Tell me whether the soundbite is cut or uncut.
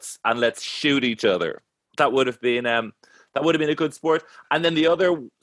uncut